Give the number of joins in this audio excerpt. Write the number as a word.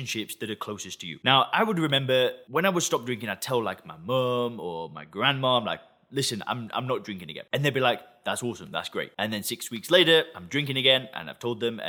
zero